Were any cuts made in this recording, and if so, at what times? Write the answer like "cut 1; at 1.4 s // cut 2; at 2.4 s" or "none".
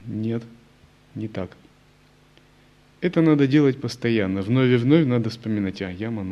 none